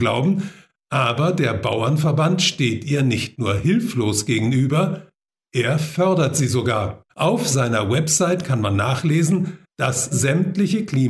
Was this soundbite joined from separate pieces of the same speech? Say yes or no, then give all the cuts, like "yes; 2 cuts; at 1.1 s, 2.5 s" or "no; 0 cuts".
yes; 2 cuts; at 7.1 s, 10.1 s